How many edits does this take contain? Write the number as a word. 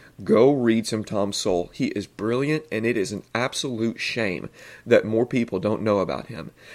zero